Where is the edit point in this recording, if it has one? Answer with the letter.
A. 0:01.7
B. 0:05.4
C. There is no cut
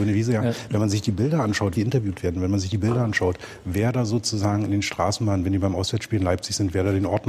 A